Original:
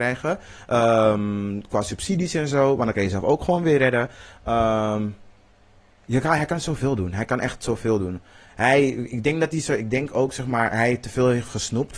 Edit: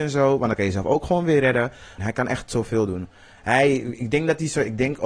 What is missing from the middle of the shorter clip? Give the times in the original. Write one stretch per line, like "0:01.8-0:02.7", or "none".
0:04.4-0:07.1